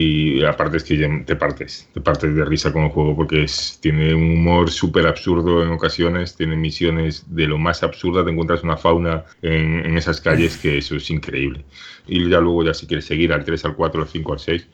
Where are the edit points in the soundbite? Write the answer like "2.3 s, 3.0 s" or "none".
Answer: 9.3 s, 12.0 s